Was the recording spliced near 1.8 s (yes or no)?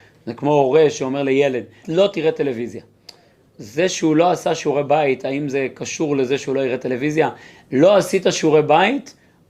yes